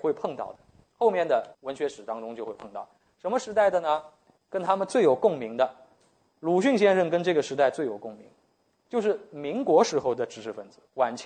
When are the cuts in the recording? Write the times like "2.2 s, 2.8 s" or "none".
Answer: 1.5 s